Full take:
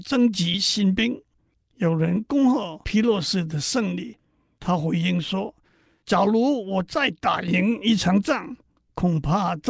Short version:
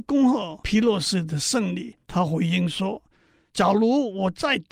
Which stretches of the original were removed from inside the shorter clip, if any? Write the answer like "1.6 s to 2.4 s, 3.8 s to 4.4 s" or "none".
4.2 s to 4.5 s